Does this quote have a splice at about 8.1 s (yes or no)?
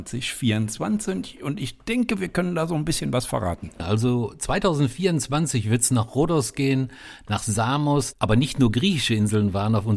yes